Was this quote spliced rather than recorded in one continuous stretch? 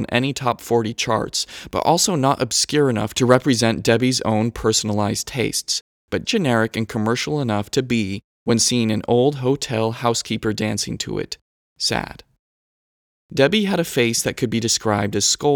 yes; 1 cut; at 6.2 s

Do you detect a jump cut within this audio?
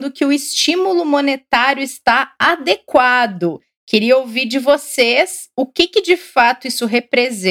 no; 0 cuts

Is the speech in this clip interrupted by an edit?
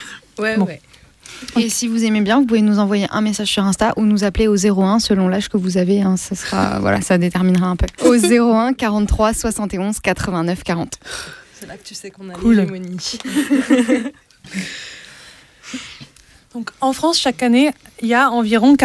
yes; 1 cut; at 8.0 s

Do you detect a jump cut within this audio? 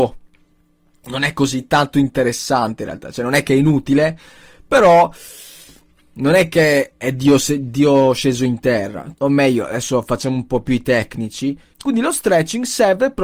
yes; 2 cuts; at 9.1 s, 11.7 s

